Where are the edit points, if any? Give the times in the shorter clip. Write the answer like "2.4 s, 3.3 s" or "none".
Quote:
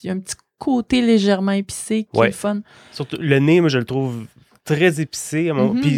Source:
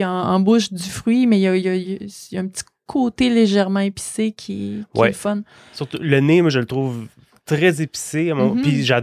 2.1 s